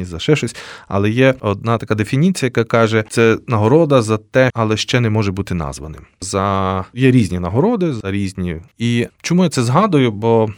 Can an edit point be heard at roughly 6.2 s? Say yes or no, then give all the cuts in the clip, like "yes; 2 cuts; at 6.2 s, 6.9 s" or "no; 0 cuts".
yes; 3 cuts; at 4.5 s, 6.2 s, 8.7 s